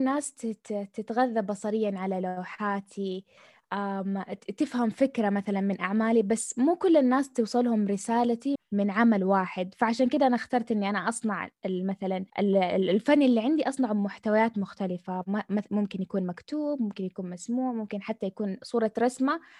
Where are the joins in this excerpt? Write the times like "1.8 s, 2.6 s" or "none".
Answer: 8.6 s, 12.3 s